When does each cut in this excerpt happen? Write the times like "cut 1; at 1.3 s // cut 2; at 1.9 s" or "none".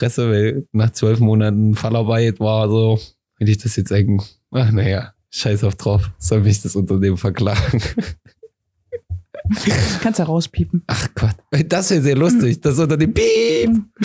none

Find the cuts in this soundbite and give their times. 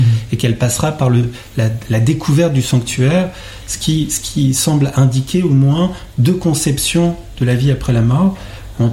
none

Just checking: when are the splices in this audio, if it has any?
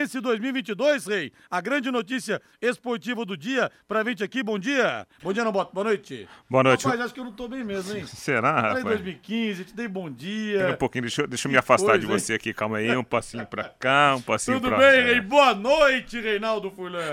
none

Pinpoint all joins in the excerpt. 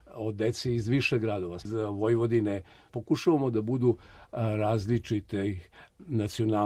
cut 1; at 1.6 s

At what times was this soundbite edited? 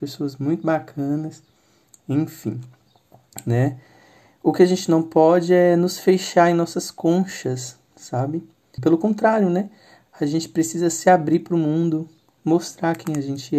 cut 1; at 8.8 s

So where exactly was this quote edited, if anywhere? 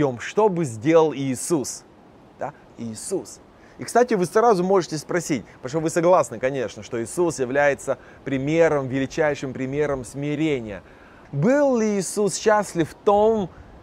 cut 1; at 2.6 s // cut 2; at 11.2 s

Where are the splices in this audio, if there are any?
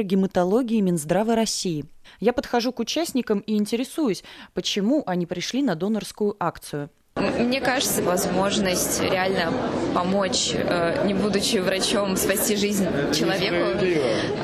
cut 1; at 2.0 s // cut 2; at 8.0 s

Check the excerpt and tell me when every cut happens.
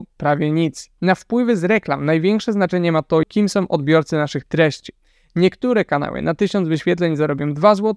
cut 1; at 1.0 s // cut 2; at 3.2 s

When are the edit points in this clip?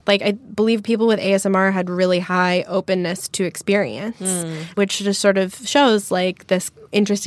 none

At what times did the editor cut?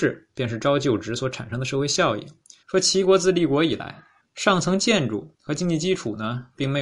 cut 1; at 2.6 s // cut 2; at 4.2 s

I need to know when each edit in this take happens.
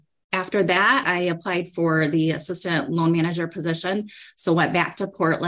cut 1; at 1.0 s

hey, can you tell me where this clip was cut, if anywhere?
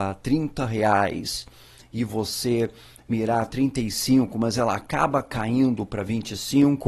cut 1; at 3.0 s

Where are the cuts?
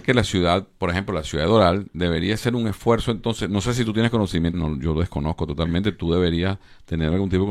cut 1; at 4.5 s

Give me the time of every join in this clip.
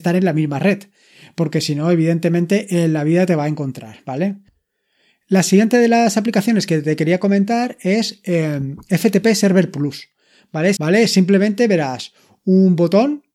cut 1; at 10.8 s

